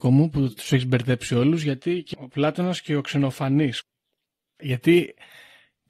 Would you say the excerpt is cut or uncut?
cut